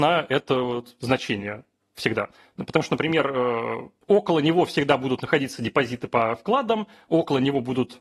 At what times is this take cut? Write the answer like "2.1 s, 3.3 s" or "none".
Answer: 4.0 s